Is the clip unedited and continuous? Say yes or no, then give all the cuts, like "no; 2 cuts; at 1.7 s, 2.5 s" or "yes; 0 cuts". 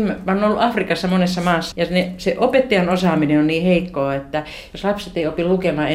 no; 1 cut; at 1.7 s